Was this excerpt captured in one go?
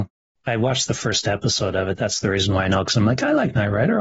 yes; 0 cuts

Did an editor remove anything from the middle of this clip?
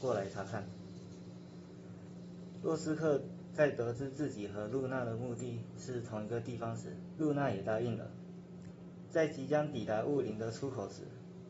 yes; 1 cut; at 7.2 s

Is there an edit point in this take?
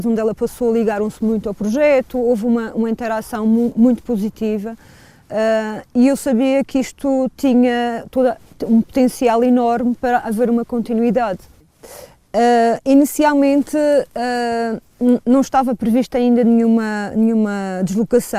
no; 0 cuts

